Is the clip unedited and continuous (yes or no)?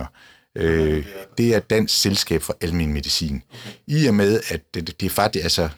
yes